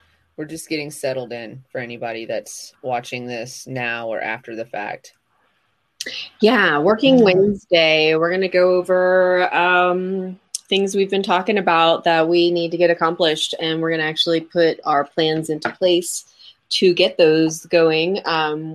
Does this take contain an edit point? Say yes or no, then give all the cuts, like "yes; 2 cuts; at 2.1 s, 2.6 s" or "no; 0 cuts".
no; 0 cuts